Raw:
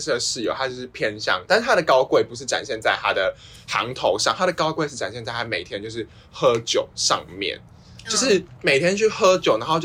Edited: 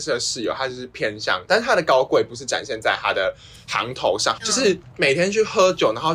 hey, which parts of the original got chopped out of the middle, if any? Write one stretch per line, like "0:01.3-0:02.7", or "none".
0:04.4-0:08.0

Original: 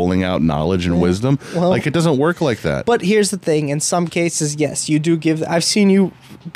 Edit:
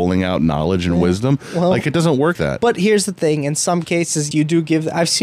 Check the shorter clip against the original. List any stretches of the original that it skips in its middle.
0:02.4-0:02.6
0:04.6-0:04.9

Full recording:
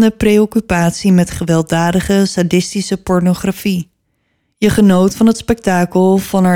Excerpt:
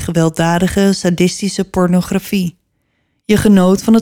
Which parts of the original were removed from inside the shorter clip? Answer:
none

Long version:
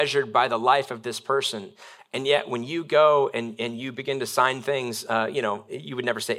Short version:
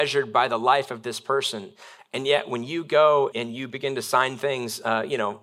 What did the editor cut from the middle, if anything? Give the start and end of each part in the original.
0:03.3-0:03.6

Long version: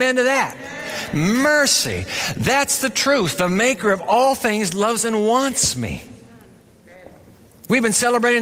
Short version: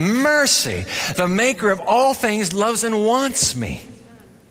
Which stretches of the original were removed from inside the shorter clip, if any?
0:02.3-0:03.4

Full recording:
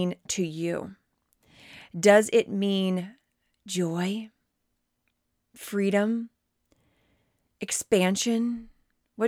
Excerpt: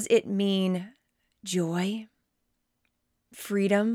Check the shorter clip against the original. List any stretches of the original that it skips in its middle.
none

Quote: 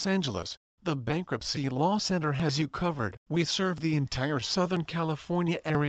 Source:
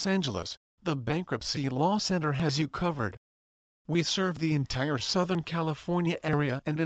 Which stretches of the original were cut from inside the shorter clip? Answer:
0:03.2-0:03.8

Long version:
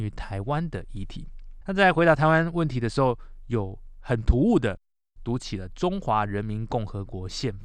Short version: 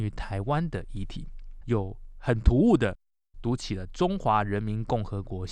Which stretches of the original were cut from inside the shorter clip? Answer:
0:01.6-0:03.5

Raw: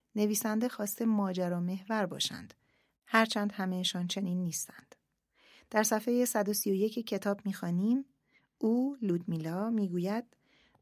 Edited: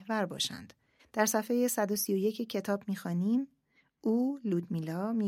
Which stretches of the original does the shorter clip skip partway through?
0:02.8-0:05.6

